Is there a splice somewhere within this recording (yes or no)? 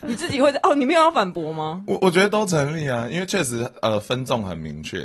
no